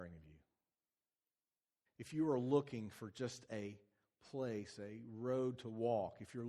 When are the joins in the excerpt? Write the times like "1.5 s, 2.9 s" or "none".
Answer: 1.9 s